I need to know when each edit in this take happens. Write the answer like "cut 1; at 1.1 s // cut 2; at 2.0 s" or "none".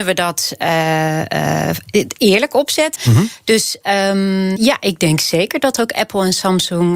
cut 1; at 3.0 s // cut 2; at 4.6 s